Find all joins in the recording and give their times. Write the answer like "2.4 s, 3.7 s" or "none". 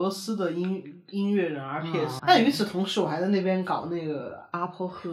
2.2 s